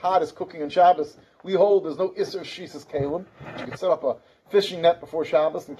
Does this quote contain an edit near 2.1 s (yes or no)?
no